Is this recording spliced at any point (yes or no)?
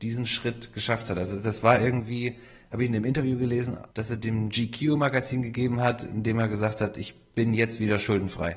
yes